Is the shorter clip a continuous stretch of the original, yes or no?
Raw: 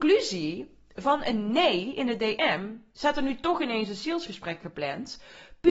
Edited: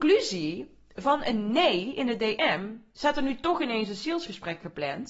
yes